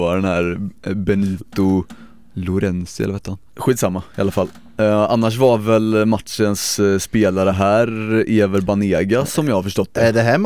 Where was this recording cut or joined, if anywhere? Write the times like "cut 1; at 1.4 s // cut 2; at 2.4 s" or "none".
none